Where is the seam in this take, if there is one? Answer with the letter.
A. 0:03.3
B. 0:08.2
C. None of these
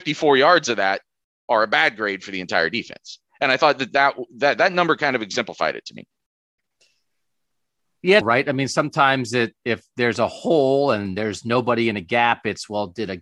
B